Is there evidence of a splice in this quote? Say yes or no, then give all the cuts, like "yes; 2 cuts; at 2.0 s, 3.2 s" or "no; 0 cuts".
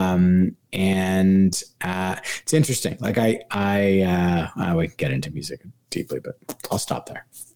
no; 0 cuts